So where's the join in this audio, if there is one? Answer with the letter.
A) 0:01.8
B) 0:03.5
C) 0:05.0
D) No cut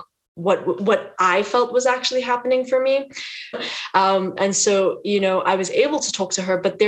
B